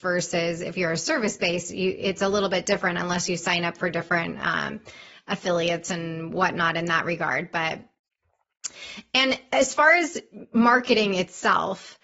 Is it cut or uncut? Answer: uncut